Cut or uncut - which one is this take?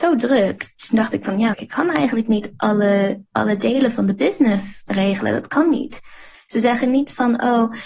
cut